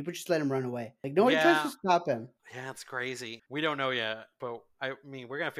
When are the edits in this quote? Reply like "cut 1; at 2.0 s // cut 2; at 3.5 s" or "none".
cut 1; at 3.4 s